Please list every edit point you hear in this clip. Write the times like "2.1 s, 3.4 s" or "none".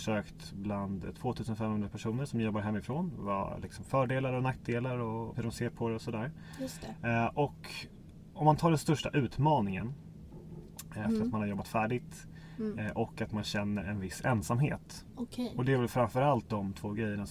5.3 s, 11.0 s

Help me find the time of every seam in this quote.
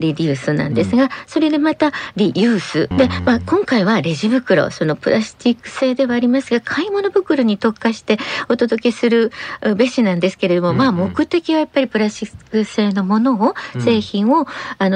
2.9 s

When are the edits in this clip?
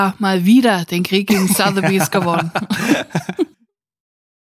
3.5 s

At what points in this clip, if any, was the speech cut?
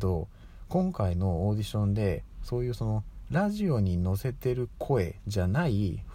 none

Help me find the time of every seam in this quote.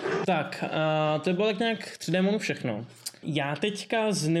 3.2 s

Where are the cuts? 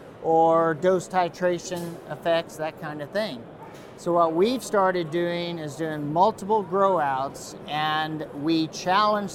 none

